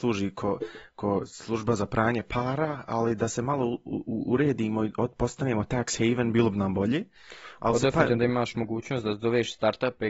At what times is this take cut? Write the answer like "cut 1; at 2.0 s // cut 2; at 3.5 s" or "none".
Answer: none